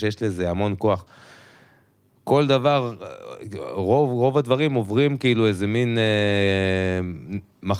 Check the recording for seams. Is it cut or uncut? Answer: uncut